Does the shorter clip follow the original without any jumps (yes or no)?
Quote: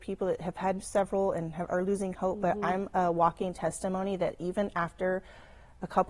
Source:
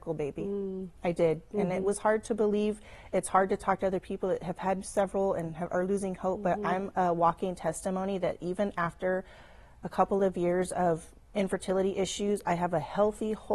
yes